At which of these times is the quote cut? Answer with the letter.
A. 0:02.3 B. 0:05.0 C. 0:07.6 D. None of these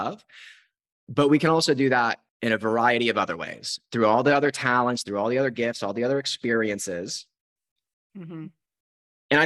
A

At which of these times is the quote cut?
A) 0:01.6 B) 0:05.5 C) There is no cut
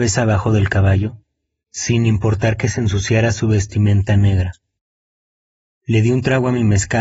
A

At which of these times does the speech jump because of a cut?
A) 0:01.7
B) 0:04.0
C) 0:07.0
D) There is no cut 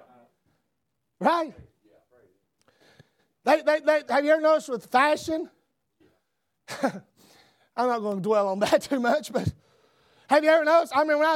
B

